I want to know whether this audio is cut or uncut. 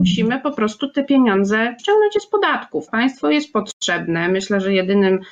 cut